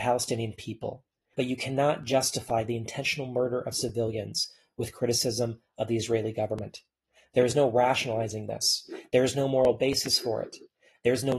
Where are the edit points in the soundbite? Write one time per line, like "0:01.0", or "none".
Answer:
0:01.3